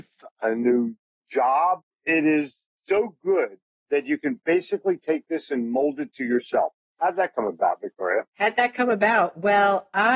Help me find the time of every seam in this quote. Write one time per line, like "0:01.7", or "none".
none